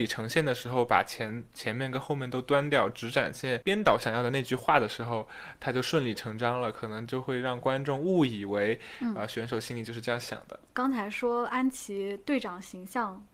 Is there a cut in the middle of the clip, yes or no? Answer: no